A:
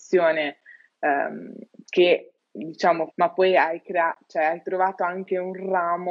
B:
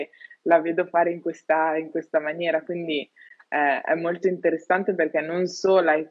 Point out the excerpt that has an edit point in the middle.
A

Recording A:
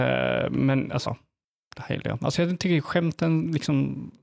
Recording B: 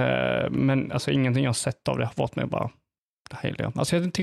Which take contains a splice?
A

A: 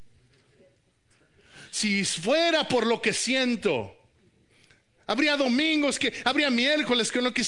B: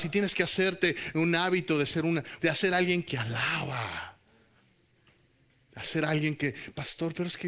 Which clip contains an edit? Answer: B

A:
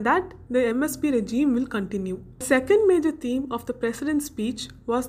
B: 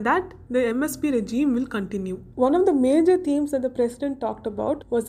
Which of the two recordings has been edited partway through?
B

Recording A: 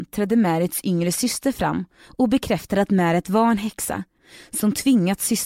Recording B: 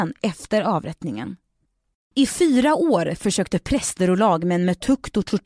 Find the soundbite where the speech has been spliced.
B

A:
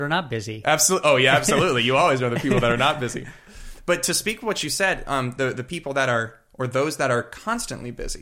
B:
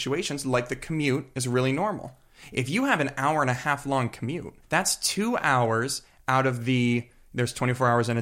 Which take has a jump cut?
B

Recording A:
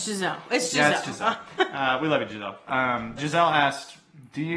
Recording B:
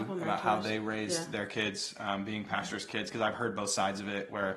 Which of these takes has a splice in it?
A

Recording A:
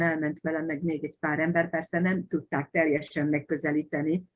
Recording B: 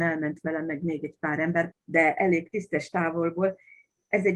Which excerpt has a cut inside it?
B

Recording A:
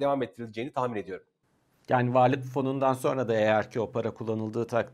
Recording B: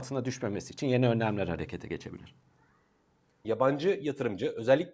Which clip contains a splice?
B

